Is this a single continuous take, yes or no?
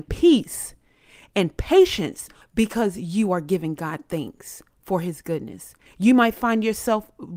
no